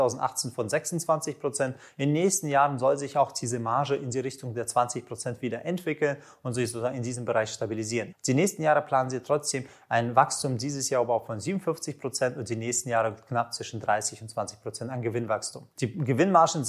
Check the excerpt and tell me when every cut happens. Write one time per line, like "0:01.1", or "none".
0:08.1